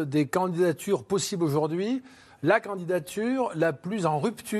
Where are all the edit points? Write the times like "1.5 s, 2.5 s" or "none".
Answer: none